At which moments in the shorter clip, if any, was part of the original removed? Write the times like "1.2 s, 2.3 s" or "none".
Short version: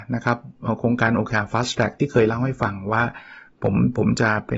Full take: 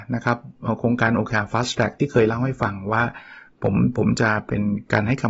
none